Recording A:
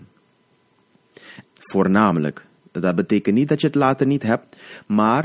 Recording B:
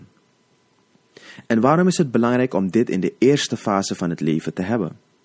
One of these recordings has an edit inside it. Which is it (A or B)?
A